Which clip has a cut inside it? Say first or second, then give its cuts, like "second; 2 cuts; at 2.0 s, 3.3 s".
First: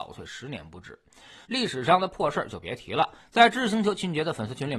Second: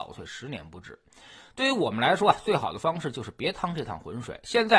first; 2 cuts; at 1.5 s, 3.2 s